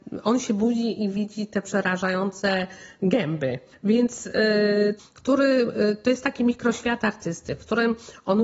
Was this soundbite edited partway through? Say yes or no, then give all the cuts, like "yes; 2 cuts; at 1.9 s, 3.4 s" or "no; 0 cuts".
yes; 2 cuts; at 3.7 s, 5.0 s